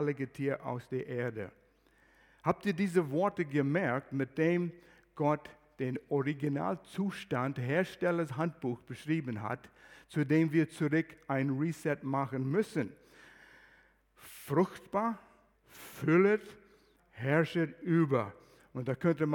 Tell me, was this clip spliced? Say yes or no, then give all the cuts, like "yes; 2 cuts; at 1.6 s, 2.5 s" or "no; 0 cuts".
yes; 2 cuts; at 15.5 s, 17.0 s